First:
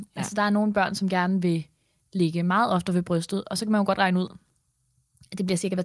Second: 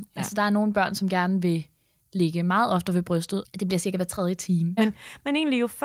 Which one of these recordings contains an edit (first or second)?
second